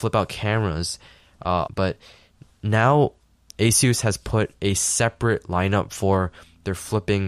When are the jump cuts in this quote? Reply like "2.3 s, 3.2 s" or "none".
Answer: 1.7 s